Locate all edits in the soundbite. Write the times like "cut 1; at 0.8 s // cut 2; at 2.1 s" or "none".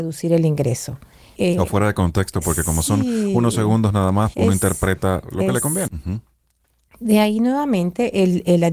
cut 1; at 1.4 s // cut 2; at 4.3 s // cut 3; at 5.9 s